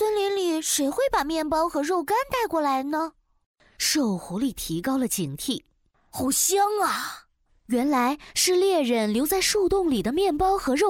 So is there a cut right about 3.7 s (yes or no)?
no